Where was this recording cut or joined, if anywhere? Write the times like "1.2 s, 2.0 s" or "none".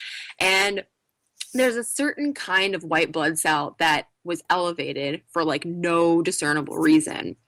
4.4 s

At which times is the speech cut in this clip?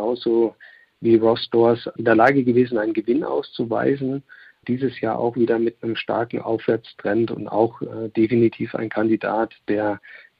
none

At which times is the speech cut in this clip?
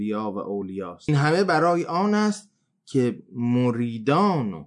none

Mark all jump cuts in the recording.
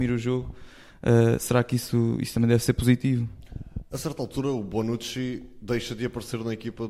none

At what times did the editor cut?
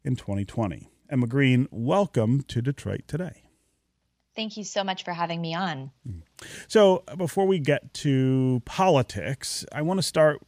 none

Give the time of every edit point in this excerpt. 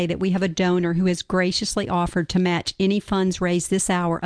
none

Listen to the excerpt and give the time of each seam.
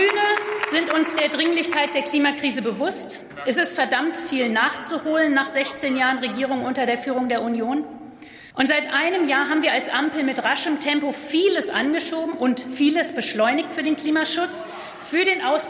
8.5 s

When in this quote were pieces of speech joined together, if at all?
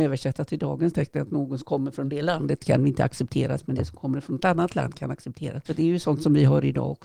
none

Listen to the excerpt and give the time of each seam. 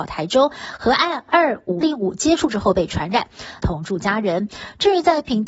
1.8 s, 3.6 s

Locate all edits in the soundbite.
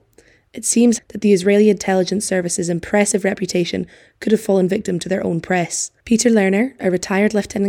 1.0 s, 6.0 s

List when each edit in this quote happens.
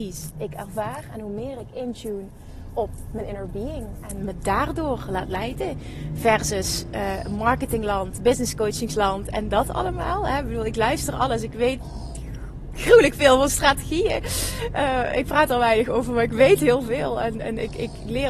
none

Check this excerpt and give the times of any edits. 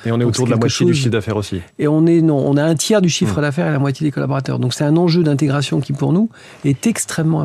none

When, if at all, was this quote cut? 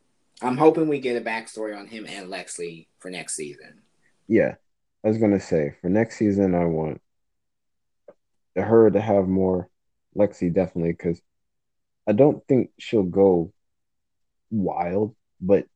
none

